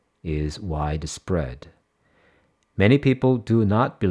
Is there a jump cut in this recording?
no; 0 cuts

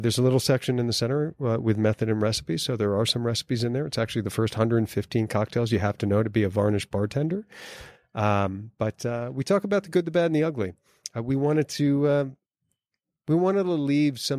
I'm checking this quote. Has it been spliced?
no; 0 cuts

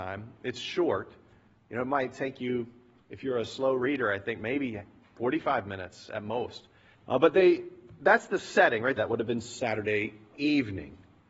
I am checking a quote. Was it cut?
yes; 2 cuts; at 6.9 s, 9.0 s

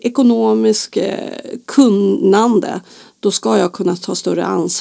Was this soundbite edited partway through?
no; 0 cuts

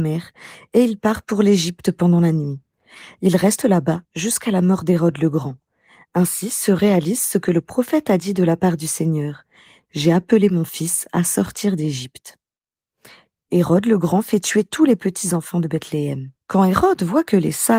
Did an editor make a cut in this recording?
yes; 1 cut; at 16.4 s

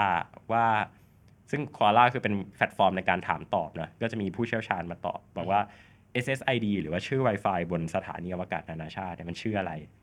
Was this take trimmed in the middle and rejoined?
no; 0 cuts

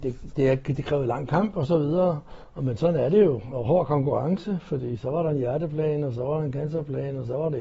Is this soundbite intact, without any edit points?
yes; 0 cuts

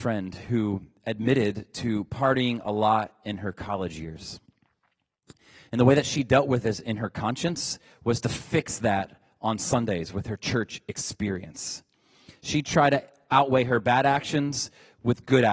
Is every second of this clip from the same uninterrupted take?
yes; 0 cuts

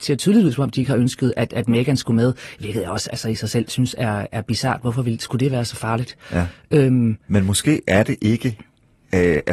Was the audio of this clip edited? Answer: no; 0 cuts

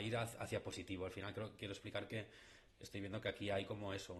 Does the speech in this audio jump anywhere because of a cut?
no; 0 cuts

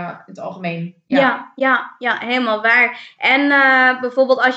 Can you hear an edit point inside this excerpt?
no; 0 cuts

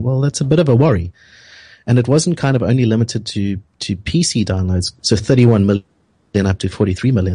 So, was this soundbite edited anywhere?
yes; 1 cut; at 5.0 s

